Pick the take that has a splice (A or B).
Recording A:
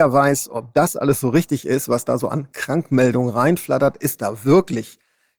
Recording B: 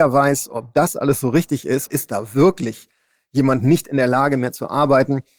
B